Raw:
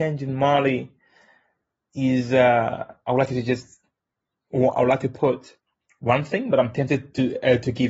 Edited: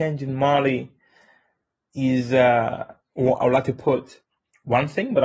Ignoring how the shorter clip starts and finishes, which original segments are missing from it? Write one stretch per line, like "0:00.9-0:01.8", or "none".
0:03.0-0:04.4